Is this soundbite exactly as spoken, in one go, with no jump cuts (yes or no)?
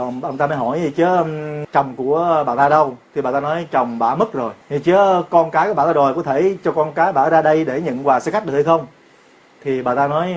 no